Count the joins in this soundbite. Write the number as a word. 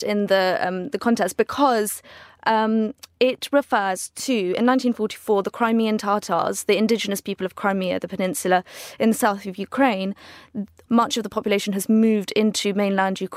one